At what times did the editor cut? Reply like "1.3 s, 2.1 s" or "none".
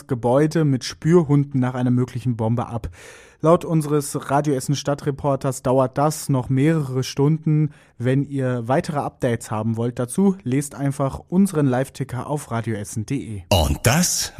none